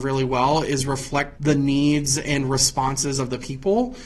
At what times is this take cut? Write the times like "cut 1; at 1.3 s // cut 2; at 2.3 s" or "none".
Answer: cut 1; at 1.4 s